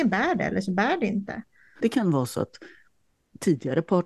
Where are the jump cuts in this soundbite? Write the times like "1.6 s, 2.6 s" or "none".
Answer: 1.8 s